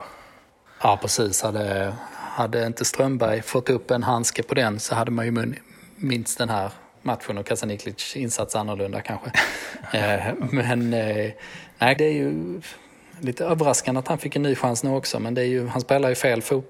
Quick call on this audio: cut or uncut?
cut